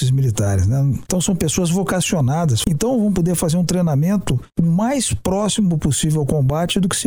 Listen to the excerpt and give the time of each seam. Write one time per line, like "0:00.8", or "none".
0:01.1
0:02.6

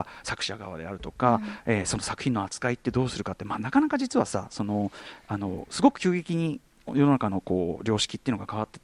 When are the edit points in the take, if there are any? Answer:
none

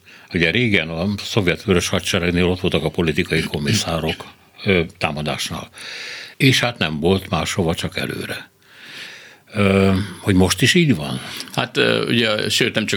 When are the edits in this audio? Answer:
0:06.3

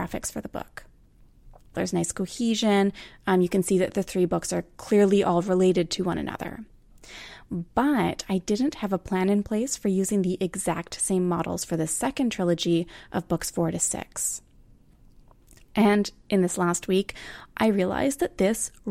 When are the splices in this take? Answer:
0:01.7

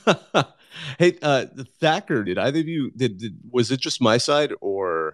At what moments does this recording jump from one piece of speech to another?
0:02.2

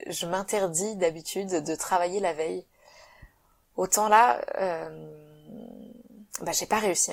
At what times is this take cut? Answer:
none

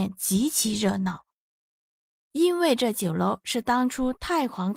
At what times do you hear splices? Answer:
0:02.3

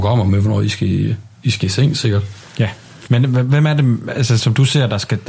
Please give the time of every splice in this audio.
0:03.1
0:04.4

